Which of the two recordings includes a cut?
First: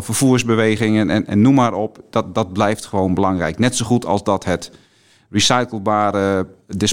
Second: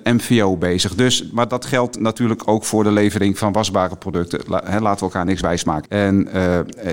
second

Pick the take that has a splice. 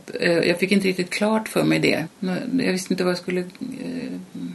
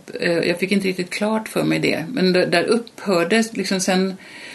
first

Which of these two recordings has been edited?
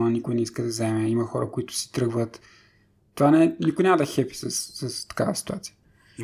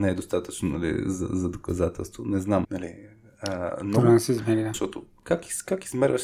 second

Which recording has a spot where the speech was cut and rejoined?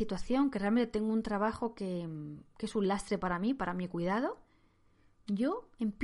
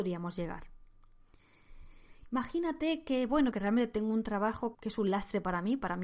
second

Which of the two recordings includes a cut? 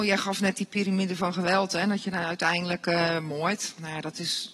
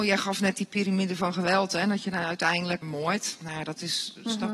second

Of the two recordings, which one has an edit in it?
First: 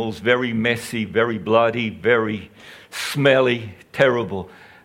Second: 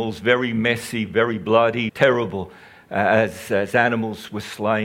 second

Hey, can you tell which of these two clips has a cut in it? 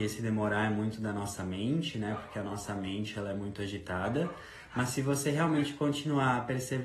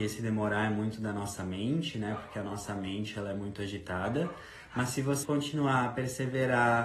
second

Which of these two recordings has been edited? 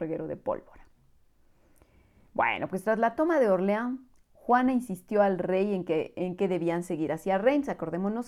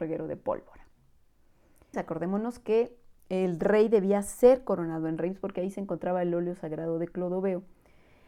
second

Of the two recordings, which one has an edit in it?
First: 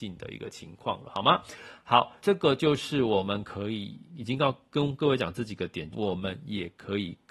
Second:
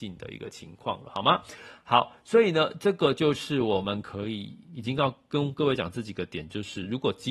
first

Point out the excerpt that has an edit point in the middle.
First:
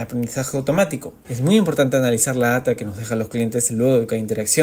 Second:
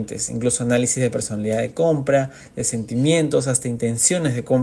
first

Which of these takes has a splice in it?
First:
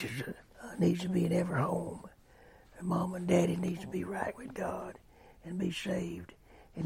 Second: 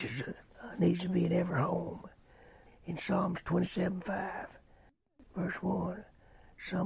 second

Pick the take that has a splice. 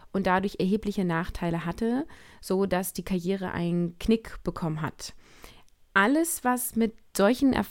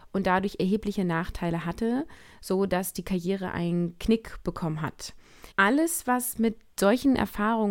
second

